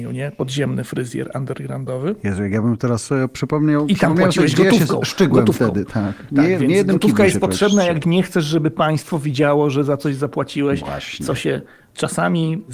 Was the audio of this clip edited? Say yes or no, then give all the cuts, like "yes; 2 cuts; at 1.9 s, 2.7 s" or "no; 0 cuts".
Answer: no; 0 cuts